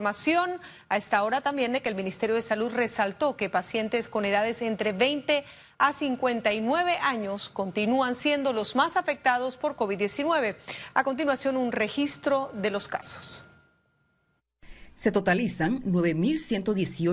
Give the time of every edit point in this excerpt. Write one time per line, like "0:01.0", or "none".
none